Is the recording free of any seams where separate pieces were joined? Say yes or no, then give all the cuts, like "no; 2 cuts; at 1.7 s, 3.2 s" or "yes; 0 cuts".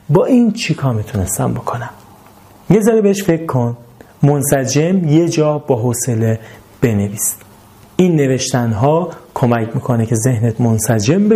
yes; 0 cuts